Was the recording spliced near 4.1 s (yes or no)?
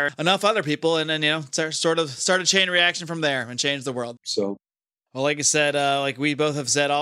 yes